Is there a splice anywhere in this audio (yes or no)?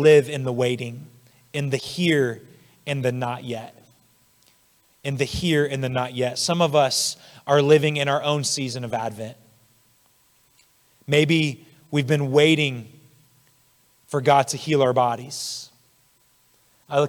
no